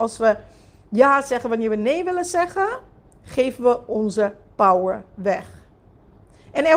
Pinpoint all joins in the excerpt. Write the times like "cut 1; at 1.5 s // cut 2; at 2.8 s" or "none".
none

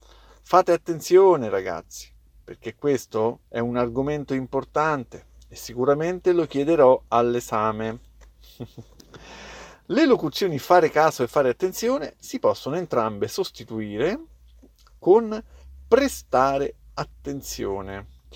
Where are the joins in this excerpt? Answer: none

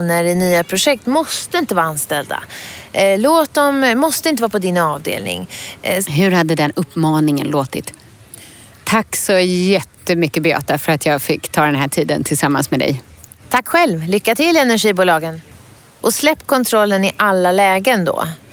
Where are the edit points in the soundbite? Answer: cut 1; at 6.0 s // cut 2; at 8.7 s // cut 3; at 16.0 s

